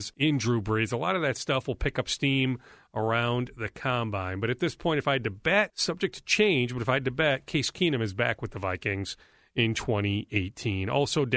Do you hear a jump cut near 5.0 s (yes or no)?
no